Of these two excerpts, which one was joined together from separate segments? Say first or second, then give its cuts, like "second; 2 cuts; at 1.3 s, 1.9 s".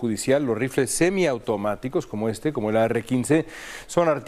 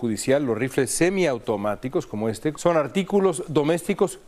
second; 1 cut; at 2.5 s